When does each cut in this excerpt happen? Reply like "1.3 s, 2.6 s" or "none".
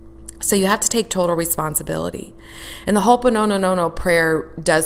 none